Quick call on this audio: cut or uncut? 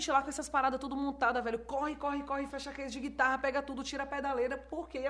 cut